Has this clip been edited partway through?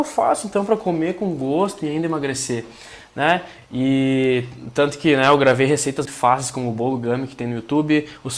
yes; 2 cuts; at 3.6 s, 6.0 s

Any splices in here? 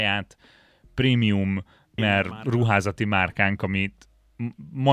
yes; 1 cut; at 2.0 s

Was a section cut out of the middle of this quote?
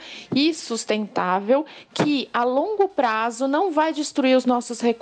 no; 0 cuts

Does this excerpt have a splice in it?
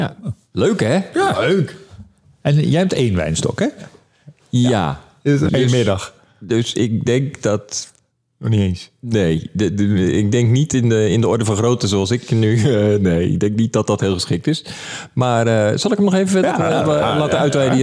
yes; 1 cut; at 5.5 s

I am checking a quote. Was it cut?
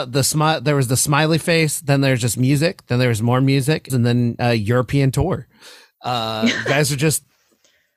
yes; 1 cut; at 3.9 s

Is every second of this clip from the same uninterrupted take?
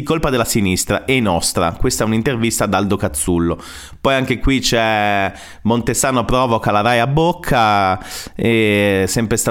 yes; 0 cuts

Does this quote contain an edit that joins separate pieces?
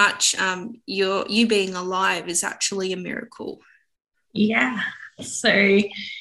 no; 0 cuts

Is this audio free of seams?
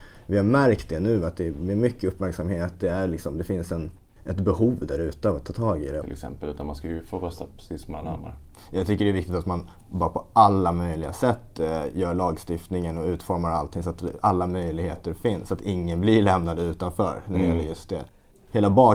no; 1 cut; at 6.0 s

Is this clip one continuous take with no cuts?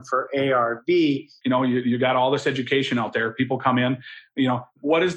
no; 1 cut; at 1.4 s

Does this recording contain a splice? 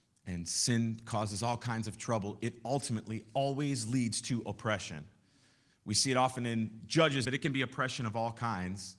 yes; 1 cut; at 7.3 s

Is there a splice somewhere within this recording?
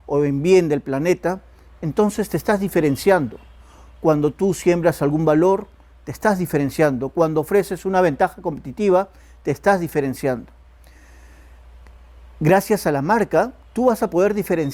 no; 0 cuts

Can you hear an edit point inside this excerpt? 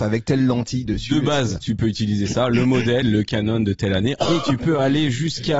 yes; 2 cuts; at 3.0 s, 4.2 s

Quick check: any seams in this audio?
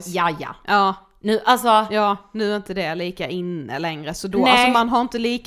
no; 0 cuts

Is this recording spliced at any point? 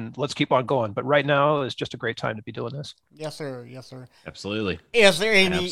no; 0 cuts

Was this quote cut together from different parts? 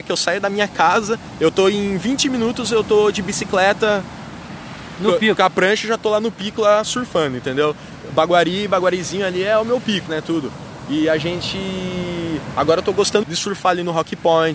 yes; 2 cuts; at 10.1 s, 13.2 s

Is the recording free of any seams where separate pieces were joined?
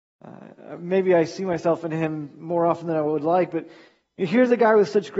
yes; 0 cuts

